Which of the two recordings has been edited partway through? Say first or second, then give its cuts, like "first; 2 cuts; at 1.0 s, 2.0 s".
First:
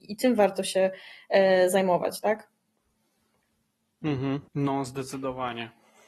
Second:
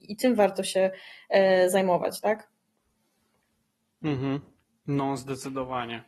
first; 1 cut; at 4.5 s